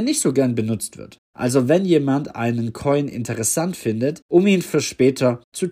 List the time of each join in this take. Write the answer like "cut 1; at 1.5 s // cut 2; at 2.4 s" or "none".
cut 1; at 1.3 s // cut 2; at 4.2 s